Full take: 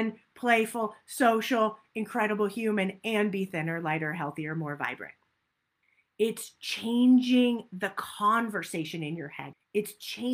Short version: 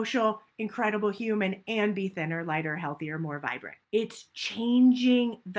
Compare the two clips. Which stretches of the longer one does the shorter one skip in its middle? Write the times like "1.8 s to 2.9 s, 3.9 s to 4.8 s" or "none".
5.2 s to 6.1 s